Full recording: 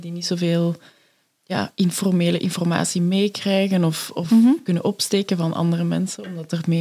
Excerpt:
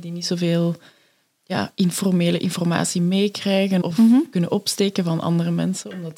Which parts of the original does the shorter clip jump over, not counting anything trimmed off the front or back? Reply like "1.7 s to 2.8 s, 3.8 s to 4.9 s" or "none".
3.8 s to 4.1 s